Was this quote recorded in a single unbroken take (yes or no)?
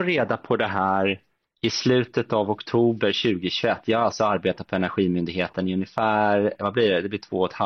yes